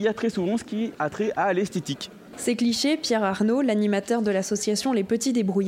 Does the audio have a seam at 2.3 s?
yes; 1 cut; at 2.3 s

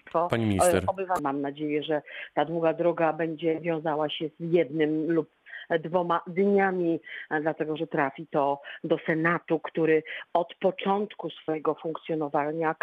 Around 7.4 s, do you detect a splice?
no; 1 cut; at 1.2 s

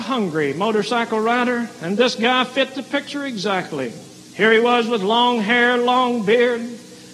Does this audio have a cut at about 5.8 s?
no; 1 cut; at 4.3 s

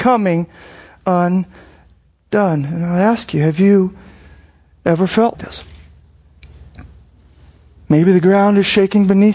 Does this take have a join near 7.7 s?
no; 1 cut; at 5.3 s

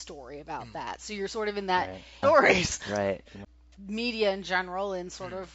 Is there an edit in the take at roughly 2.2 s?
yes; 2 cuts; at 2.2 s, 3.3 s

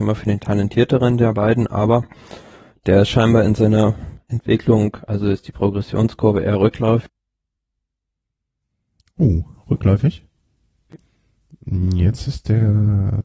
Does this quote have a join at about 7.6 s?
no; 0 cuts

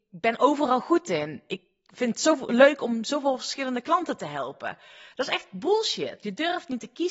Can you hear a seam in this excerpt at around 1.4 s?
no; 0 cuts

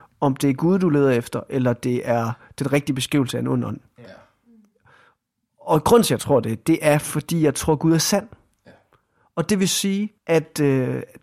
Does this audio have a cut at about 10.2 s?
yes; 1 cut; at 10.2 s

